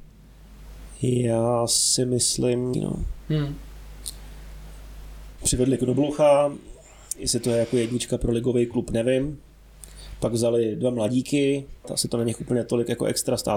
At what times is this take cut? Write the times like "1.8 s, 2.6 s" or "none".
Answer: 2.7 s, 5.4 s, 11.8 s